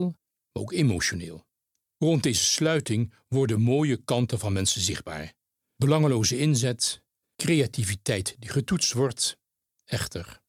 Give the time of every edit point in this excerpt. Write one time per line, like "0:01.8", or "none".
0:01.9
0:07.2